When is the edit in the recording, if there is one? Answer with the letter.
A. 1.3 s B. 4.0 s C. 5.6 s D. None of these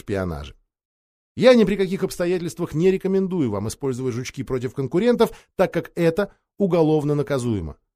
D